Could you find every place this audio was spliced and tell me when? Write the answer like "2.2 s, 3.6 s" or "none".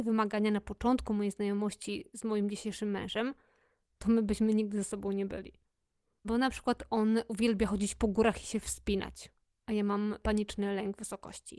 6.2 s